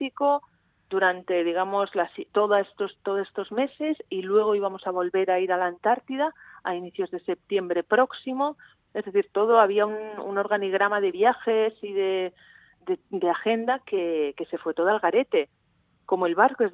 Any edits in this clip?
no; 0 cuts

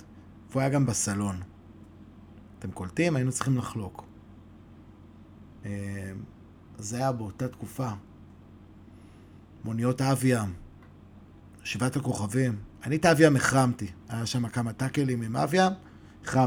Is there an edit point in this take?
no; 0 cuts

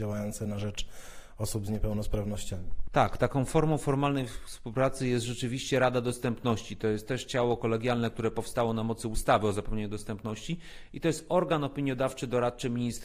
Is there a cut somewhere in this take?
no; 0 cuts

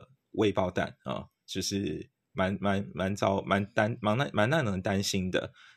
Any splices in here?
yes; 1 cut; at 2.6 s

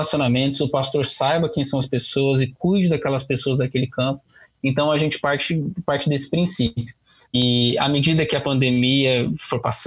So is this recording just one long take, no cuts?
no; 1 cut; at 7.2 s

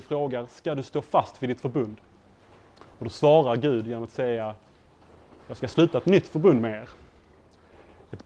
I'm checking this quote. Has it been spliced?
no; 0 cuts

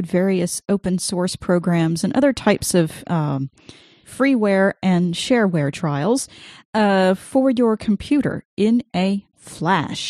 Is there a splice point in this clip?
no; 0 cuts

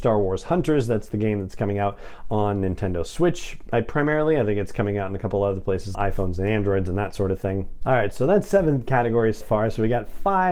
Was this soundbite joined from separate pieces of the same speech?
yes; 3 cuts; at 5.9 s, 7.8 s, 9.4 s

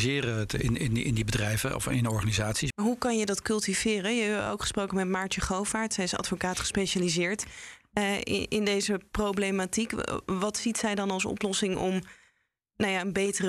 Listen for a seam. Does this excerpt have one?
yes; 1 cut; at 2.7 s

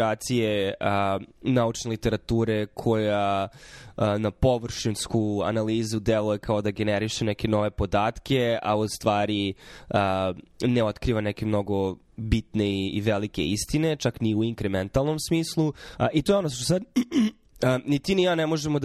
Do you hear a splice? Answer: yes; 1 cut; at 16.0 s

